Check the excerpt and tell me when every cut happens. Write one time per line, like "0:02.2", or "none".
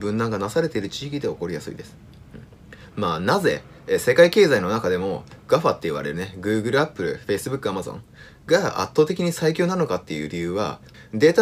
0:02.9